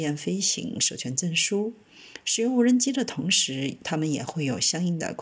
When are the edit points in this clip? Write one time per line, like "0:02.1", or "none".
0:02.2